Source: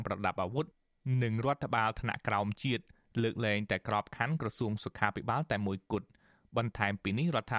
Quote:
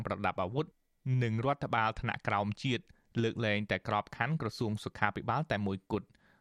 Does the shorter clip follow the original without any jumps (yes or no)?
yes